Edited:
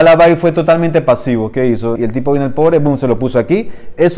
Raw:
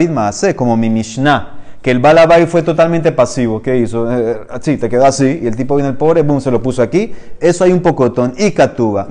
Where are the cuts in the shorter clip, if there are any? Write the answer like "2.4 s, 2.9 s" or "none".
2.0 s